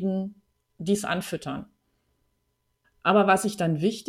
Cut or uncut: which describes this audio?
cut